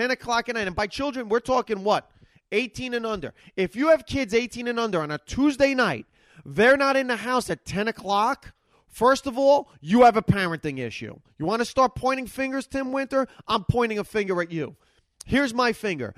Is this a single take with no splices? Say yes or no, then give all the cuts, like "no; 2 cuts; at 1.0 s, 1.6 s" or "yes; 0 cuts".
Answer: yes; 0 cuts